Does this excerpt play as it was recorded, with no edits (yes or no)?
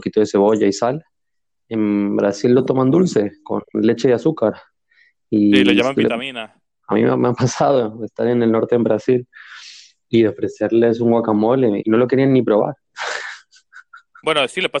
no